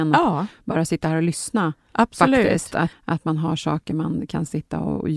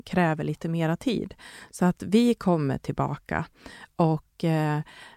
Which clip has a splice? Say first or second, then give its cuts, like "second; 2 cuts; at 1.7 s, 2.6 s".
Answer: first; 1 cut; at 2.9 s